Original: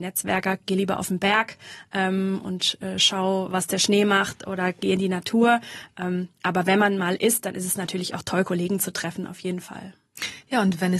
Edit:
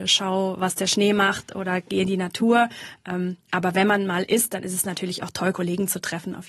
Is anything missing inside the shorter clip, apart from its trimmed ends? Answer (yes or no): no